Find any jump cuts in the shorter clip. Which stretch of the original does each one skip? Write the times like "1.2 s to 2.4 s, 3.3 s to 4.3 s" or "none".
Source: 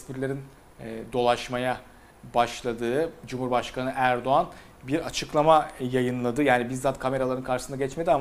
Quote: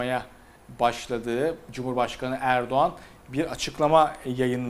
none